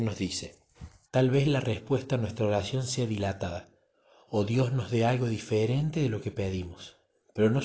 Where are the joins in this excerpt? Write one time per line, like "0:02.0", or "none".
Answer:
0:01.0